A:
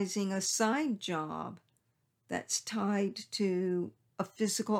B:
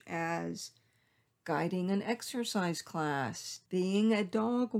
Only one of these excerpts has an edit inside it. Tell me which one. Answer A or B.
B